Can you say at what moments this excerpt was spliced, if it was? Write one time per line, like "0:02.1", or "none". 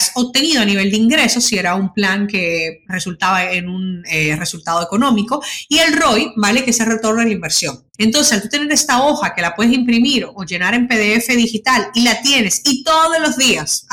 0:08.0

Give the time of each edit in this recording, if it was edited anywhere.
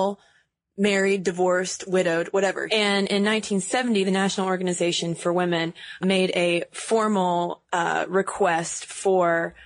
0:02.7
0:06.0

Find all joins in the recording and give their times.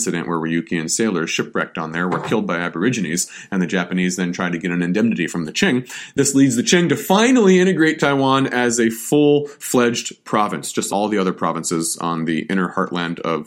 0:10.9

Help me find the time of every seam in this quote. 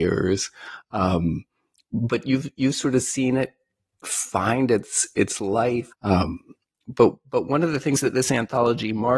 0:05.9

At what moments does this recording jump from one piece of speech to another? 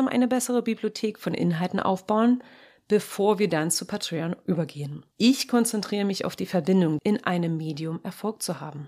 0:05.1
0:07.0

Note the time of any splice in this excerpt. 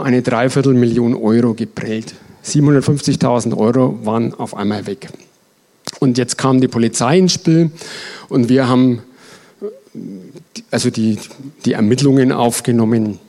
none

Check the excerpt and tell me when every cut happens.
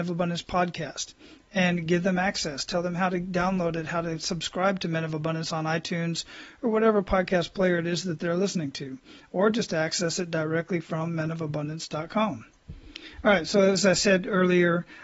none

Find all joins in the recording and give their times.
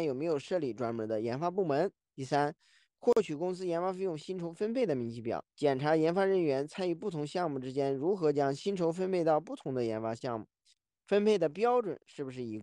0:02.1
0:05.5

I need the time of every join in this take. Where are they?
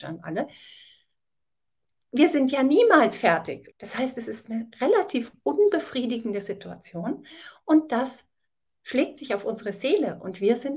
0:03.7

